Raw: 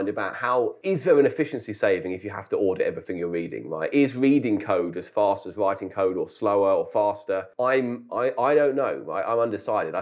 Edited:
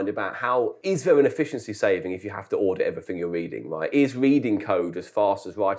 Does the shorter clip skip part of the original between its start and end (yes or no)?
no